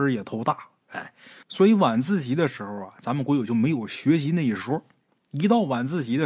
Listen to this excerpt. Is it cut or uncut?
uncut